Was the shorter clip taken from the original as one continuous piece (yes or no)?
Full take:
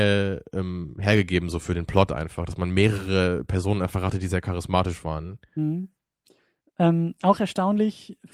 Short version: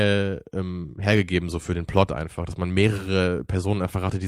yes